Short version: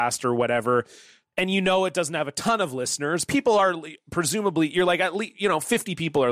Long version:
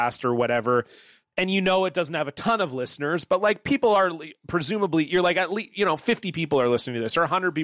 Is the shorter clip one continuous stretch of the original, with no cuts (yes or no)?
no